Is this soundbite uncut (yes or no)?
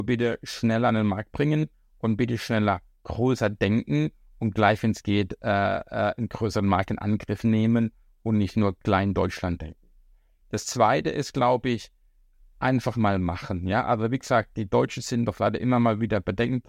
yes